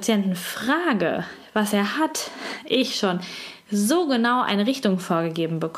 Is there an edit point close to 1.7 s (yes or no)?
no